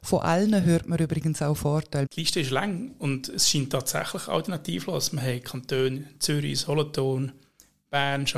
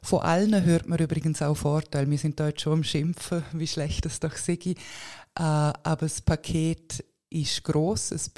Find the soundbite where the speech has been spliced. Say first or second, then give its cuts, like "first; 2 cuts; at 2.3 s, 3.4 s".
first; 1 cut; at 2.1 s